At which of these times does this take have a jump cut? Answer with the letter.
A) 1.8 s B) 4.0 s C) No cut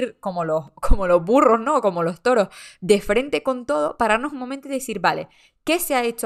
C